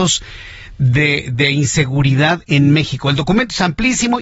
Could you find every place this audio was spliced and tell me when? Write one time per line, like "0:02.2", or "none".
none